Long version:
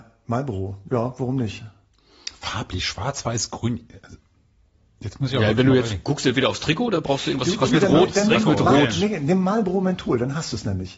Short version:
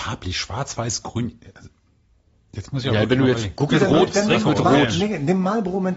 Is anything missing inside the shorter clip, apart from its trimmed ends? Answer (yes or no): yes